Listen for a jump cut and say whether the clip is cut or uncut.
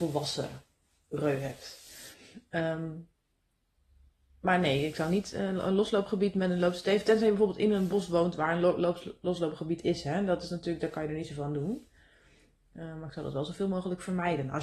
uncut